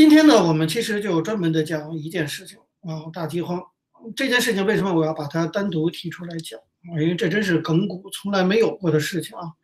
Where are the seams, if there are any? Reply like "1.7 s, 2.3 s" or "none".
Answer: none